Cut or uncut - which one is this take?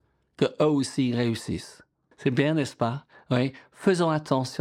cut